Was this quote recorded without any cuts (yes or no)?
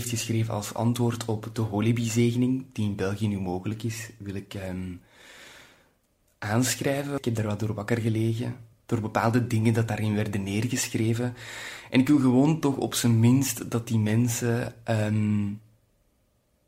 no